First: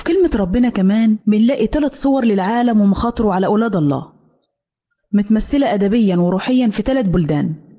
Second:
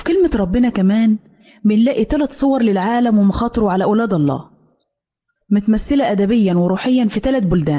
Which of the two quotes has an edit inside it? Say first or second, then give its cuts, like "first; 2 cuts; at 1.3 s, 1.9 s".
first; 1 cut; at 1.2 s